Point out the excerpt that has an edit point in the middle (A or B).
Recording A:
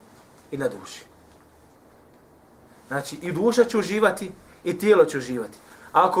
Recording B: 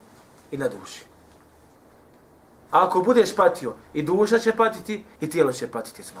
B